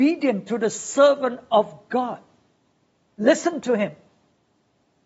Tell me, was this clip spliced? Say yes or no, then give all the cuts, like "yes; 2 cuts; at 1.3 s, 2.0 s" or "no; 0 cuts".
yes; 1 cut; at 3.1 s